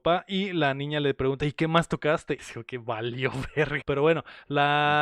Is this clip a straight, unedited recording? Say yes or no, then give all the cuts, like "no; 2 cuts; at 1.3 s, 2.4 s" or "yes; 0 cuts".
no; 2 cuts; at 2.4 s, 3.8 s